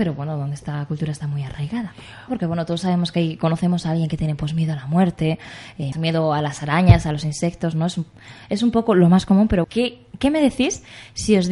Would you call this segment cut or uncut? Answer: cut